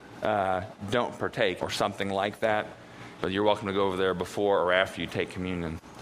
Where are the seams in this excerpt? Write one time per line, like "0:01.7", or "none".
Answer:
0:01.6
0:03.2